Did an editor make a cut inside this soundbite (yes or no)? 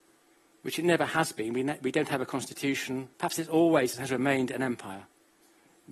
yes